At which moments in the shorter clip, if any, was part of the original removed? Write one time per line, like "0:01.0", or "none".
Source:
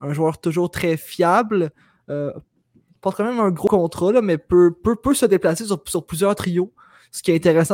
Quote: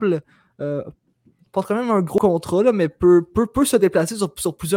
none